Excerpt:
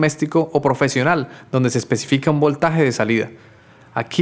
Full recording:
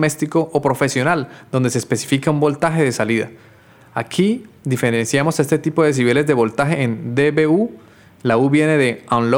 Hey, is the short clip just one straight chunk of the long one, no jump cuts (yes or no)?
yes